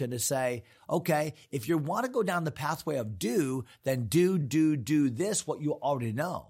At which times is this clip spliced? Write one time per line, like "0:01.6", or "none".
0:04.4

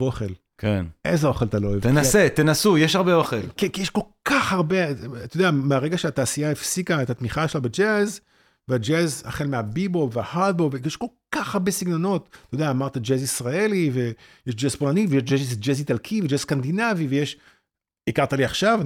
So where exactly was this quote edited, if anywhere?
none

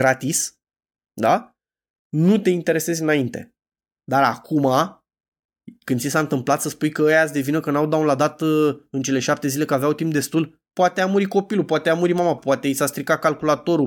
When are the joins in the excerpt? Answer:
0:04.0
0:10.7
0:12.4

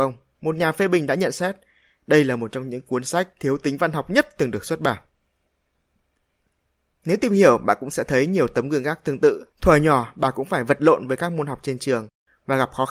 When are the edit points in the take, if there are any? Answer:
0:09.5

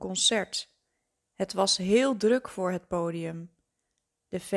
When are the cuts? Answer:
none

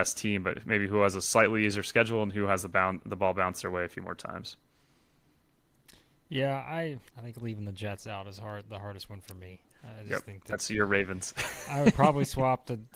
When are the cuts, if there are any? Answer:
0:07.1

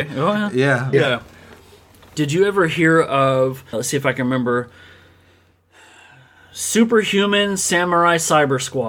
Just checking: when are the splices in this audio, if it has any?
0:00.9
0:03.7

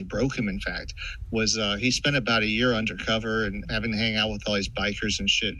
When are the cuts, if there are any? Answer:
0:03.6

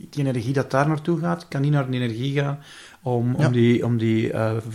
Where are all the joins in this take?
0:03.4

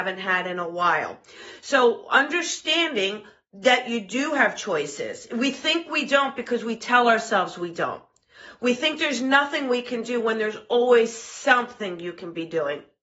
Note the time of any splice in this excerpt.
none

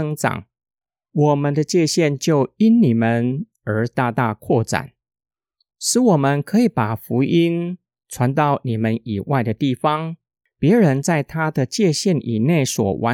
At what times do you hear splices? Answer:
none

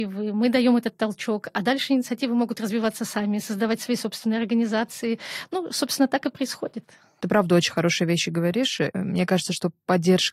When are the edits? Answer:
none

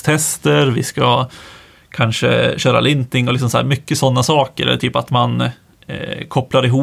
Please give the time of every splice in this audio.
none

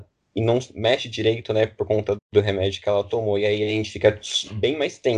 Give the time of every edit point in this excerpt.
0:02.2

